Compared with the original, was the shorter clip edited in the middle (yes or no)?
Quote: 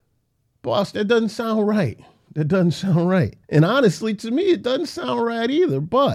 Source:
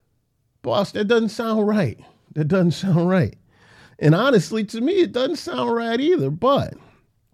yes